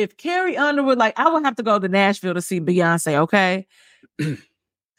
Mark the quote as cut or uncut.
cut